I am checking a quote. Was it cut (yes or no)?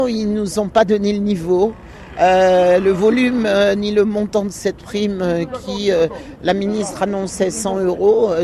no